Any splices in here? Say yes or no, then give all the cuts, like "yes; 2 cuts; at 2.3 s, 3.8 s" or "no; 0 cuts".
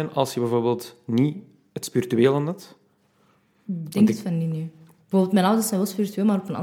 no; 0 cuts